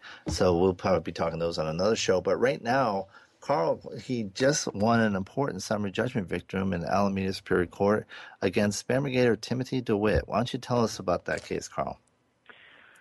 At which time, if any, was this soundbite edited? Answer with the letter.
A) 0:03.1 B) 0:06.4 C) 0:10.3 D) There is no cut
D